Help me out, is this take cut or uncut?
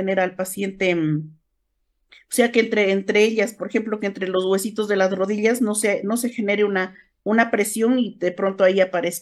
uncut